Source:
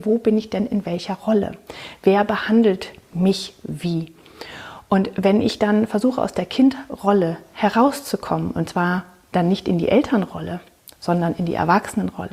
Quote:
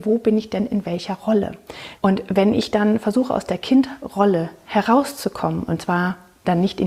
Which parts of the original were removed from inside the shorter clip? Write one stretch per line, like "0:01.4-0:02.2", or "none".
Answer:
0:02.0-0:04.8